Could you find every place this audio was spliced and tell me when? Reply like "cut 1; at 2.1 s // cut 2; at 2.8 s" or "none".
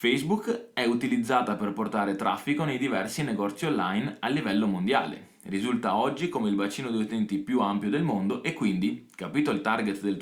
none

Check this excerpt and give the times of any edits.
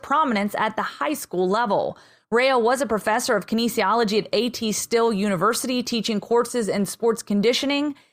none

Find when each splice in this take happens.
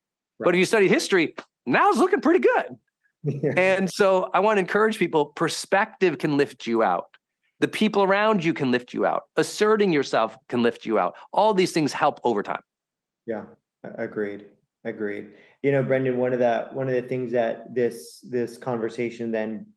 none

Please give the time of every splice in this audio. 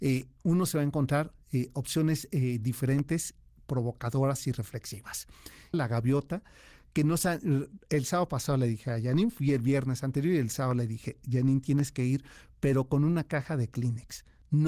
cut 1; at 5.7 s

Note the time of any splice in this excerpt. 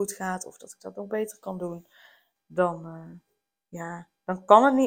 cut 1; at 2.4 s

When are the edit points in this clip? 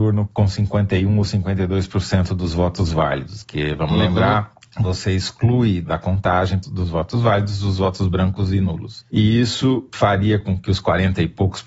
none

